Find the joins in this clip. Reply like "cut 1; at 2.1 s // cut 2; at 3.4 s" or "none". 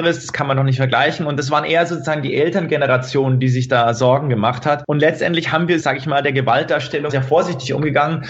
cut 1; at 5.8 s // cut 2; at 7.1 s